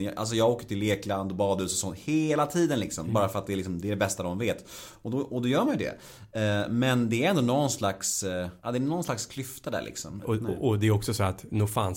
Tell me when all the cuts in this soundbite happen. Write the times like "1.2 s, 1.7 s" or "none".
8.6 s, 10.2 s